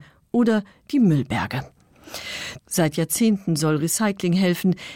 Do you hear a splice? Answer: yes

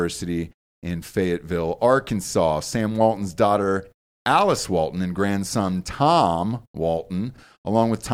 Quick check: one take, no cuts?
yes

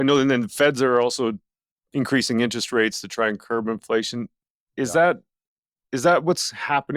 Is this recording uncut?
yes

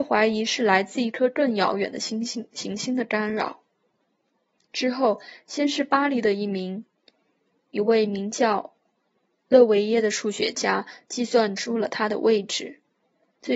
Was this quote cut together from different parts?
no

